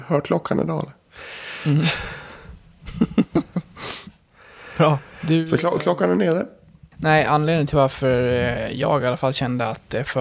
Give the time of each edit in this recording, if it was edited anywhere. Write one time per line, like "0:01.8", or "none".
0:05.1
0:06.9